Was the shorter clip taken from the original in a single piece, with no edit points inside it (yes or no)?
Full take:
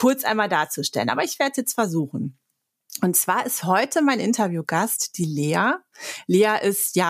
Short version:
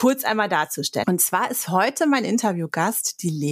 no